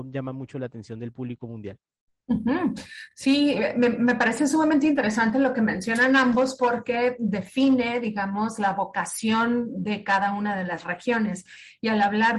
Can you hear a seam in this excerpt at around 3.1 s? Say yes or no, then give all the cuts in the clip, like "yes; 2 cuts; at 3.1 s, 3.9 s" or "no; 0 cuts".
no; 0 cuts